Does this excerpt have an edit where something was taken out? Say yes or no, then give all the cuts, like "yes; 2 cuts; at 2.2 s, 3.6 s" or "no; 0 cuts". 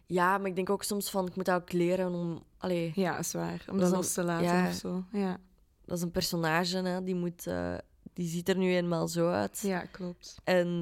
no; 0 cuts